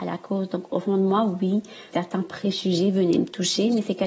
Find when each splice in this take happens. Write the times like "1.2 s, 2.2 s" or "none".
1.9 s